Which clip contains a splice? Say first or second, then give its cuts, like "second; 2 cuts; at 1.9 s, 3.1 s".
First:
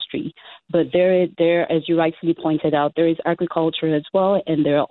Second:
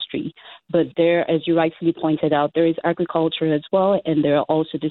second; 1 cut; at 0.9 s